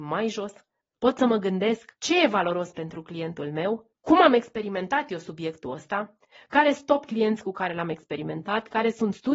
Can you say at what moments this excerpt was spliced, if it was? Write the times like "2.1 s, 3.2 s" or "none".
2.0 s